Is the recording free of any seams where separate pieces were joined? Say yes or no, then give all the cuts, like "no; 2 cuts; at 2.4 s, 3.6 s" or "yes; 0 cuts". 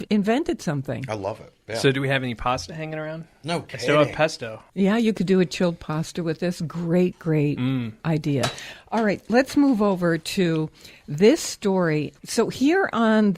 yes; 0 cuts